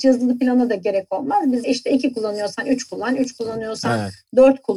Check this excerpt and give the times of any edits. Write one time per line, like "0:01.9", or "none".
0:01.6